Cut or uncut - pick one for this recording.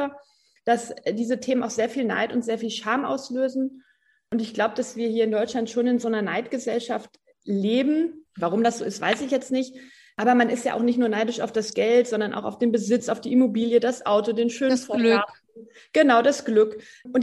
cut